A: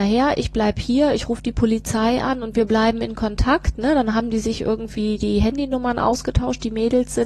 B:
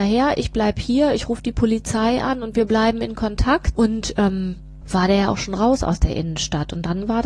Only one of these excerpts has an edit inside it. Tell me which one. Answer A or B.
B